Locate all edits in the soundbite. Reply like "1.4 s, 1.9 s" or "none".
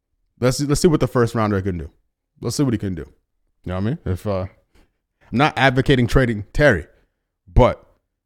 3.5 s

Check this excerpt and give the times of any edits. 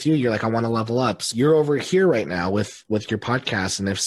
1.3 s

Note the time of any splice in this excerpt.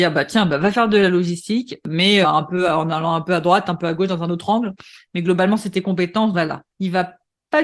2.2 s, 6.3 s

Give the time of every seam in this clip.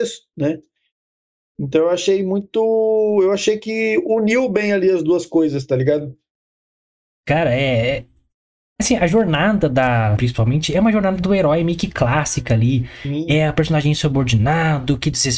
10.2 s

